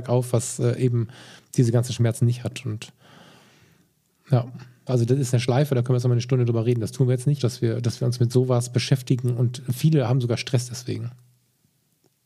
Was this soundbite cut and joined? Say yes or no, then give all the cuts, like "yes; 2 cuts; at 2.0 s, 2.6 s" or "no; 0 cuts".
yes; 2 cuts; at 4.9 s, 7.4 s